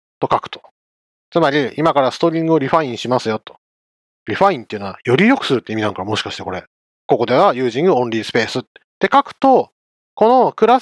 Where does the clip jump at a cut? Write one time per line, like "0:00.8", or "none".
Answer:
0:06.9